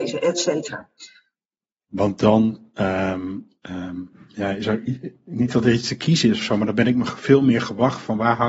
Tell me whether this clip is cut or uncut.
cut